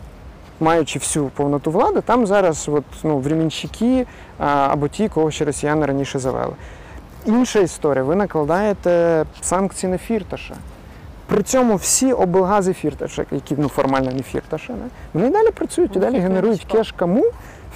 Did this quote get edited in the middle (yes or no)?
no